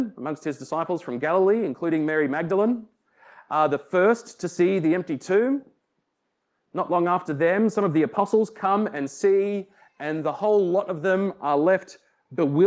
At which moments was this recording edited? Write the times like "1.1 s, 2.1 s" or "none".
none